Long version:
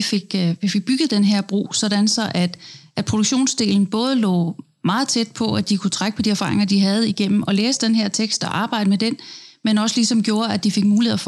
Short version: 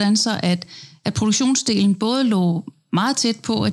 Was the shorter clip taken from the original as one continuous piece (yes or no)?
yes